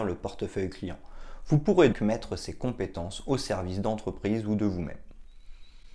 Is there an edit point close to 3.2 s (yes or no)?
no